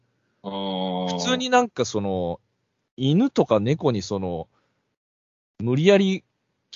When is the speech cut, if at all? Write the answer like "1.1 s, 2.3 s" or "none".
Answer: none